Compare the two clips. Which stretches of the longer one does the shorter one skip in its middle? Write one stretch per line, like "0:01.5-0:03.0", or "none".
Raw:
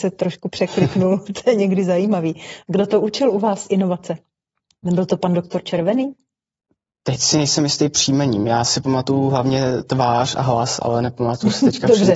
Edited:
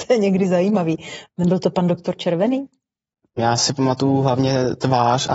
0:02.7-0:04.7
0:06.8-0:08.4